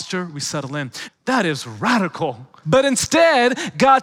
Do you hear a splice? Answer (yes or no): yes